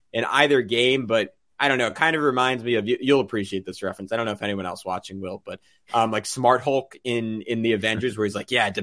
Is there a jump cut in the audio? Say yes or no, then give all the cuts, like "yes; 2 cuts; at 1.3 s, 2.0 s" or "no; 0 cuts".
no; 0 cuts